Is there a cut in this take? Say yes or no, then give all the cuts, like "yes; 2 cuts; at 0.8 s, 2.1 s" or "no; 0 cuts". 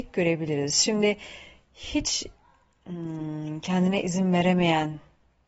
no; 0 cuts